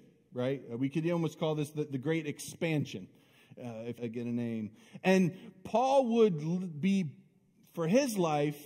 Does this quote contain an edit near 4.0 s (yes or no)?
yes